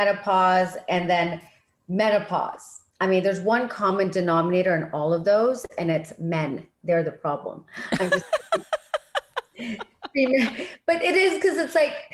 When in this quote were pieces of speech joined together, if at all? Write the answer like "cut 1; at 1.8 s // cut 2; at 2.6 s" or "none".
cut 1; at 2.9 s

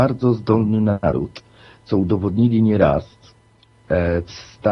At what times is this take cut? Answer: none

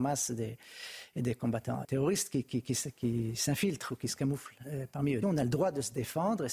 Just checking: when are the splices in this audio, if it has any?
cut 1; at 1.8 s // cut 2; at 5.2 s

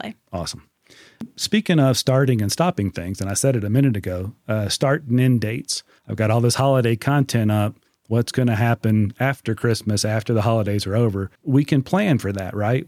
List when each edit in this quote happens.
cut 1; at 6.0 s // cut 2; at 11.4 s

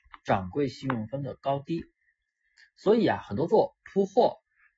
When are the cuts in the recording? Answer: none

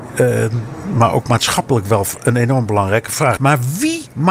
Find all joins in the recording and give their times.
cut 1; at 3.4 s

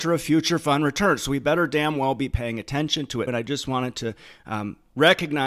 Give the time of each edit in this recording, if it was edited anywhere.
cut 1; at 3.3 s

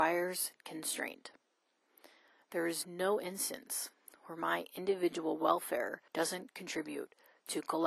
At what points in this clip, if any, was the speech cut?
cut 1; at 2.4 s // cut 2; at 6.1 s

